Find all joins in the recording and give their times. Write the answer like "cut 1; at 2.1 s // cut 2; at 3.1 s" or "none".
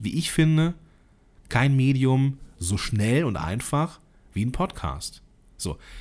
none